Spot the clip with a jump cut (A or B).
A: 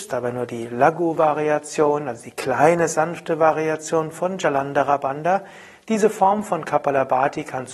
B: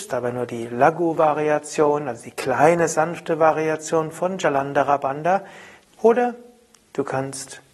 B